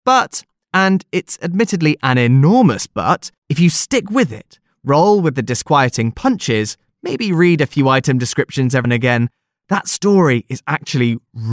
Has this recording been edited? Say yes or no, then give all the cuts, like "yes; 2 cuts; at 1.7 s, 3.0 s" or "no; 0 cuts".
yes; 2 cuts; at 3.4 s, 8.8 s